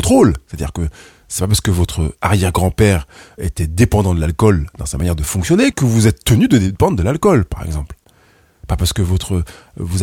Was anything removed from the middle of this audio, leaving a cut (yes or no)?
yes